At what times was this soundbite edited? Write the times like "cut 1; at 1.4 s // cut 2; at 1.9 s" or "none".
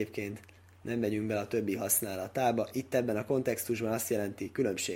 none